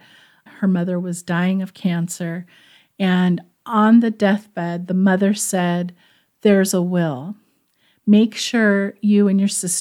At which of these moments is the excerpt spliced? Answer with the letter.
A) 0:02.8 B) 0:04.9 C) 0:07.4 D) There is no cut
D